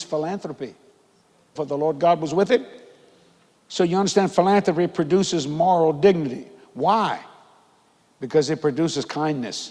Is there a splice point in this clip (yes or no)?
yes